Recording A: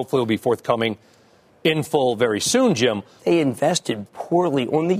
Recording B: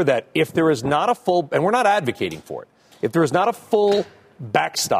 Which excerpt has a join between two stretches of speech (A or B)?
A